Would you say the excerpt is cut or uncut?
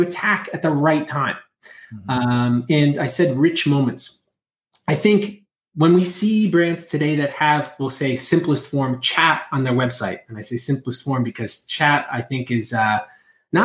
uncut